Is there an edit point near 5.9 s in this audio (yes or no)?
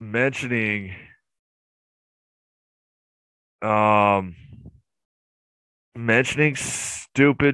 yes